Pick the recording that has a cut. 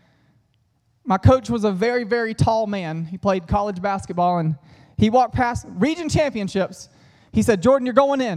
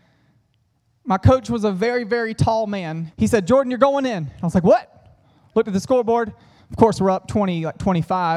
second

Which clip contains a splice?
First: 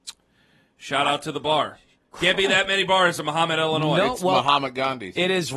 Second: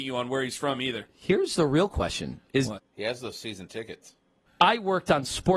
second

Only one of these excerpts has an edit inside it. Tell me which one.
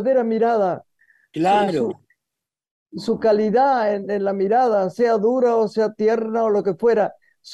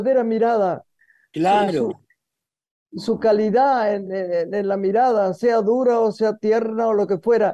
first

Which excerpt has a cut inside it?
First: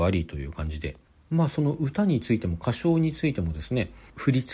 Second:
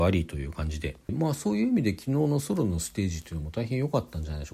second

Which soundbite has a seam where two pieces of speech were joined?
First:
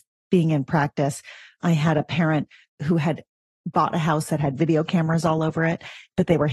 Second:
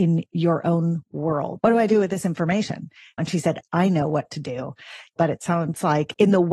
second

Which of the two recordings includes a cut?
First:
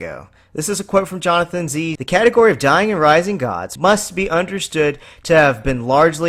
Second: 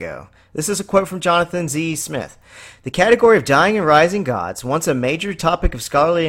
first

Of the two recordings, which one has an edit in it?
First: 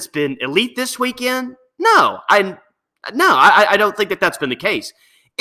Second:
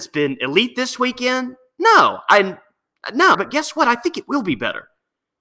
second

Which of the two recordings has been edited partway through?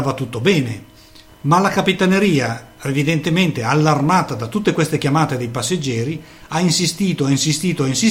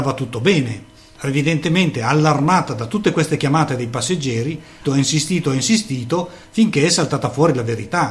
second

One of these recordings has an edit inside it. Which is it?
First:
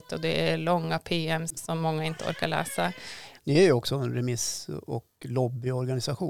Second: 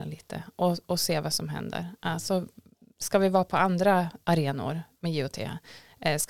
first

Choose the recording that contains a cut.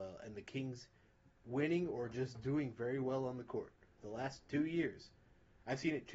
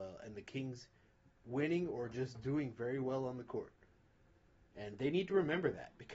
first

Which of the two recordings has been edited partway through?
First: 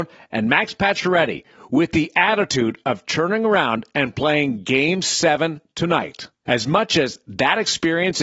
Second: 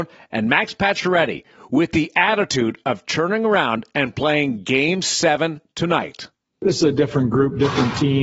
first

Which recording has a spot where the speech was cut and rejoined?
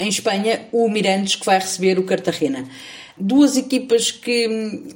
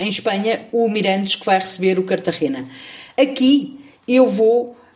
first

